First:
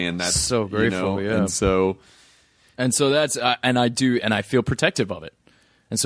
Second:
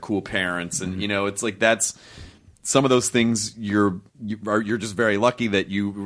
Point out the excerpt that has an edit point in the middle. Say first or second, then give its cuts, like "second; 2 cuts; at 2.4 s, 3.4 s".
second; 1 cut; at 4.1 s